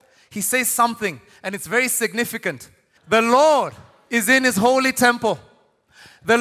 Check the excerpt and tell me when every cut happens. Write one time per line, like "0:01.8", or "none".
0:03.0